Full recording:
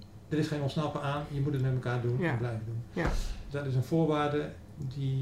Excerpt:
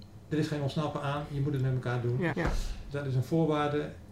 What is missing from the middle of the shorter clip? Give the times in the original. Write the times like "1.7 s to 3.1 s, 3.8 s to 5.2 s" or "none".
2.3 s to 2.9 s